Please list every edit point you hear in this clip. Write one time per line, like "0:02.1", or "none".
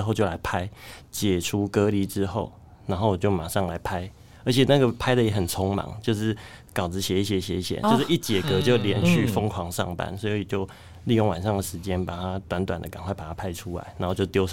0:01.0
0:07.8